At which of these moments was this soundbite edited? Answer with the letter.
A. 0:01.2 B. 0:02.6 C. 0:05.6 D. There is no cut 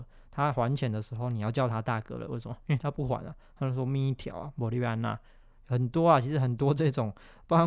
D